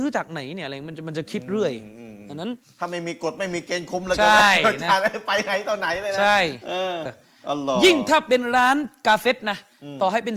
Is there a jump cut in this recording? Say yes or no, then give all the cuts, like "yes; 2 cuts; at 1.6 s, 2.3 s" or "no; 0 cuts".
yes; 1 cut; at 7.1 s